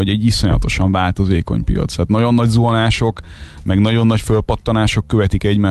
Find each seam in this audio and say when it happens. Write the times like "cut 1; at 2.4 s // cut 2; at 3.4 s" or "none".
none